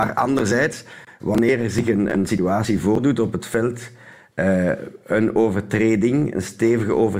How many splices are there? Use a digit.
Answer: 0